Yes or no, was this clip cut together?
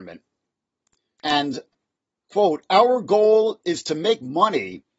yes